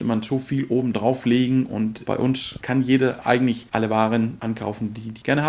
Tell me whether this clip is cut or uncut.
uncut